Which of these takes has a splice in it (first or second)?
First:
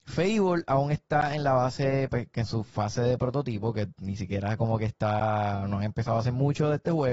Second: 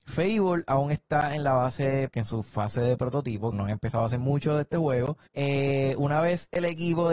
second